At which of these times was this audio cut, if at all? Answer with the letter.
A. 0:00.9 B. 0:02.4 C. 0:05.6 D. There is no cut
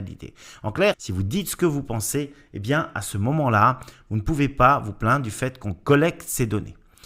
A